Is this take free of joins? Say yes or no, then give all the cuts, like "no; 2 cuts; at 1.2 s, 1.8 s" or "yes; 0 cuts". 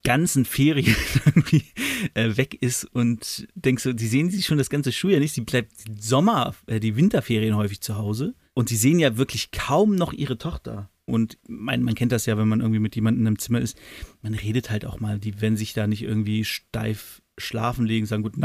no; 1 cut; at 11.1 s